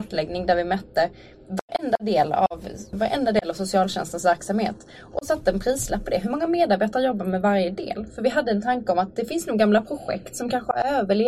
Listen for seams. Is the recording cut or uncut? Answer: cut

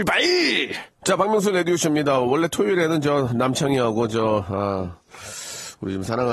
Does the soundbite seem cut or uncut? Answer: uncut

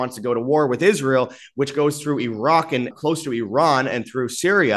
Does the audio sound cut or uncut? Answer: cut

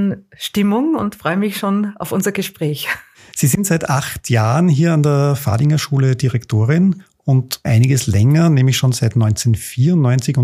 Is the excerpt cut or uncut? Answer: cut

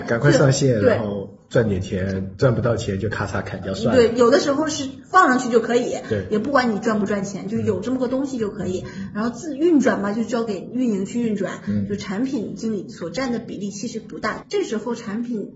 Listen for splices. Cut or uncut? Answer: uncut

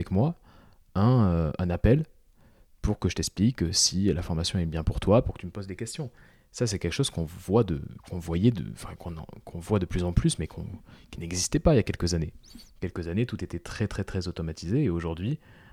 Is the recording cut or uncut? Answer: uncut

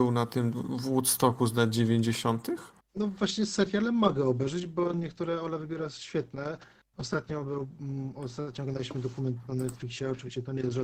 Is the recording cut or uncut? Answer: cut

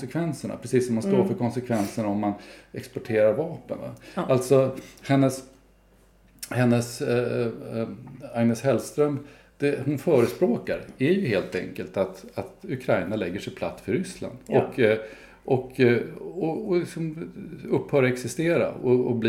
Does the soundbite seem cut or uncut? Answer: uncut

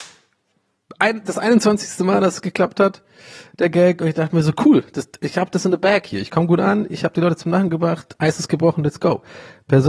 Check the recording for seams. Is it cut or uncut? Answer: uncut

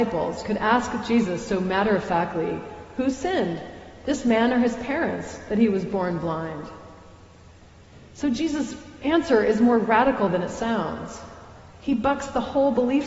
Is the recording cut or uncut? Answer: uncut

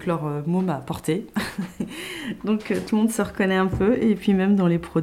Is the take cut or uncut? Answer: uncut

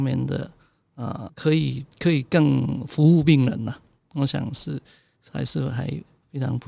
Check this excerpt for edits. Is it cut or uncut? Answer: cut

